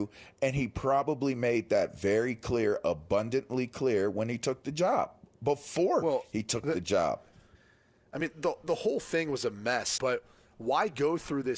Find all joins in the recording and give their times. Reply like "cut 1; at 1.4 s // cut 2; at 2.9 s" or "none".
cut 1; at 7.5 s // cut 2; at 10.0 s